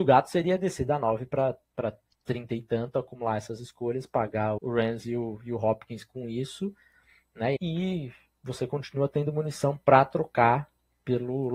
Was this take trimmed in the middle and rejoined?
yes; 2 cuts; at 4.6 s, 7.6 s

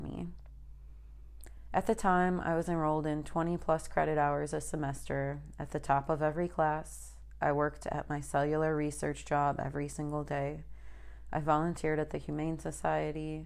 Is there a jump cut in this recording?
no; 0 cuts

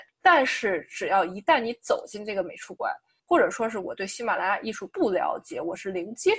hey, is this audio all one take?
no; 1 cut; at 3.2 s

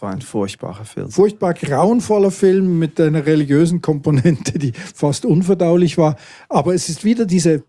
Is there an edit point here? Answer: no; 0 cuts

